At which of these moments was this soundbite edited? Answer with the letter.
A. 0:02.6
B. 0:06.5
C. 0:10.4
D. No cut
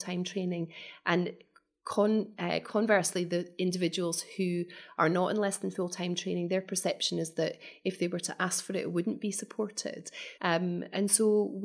C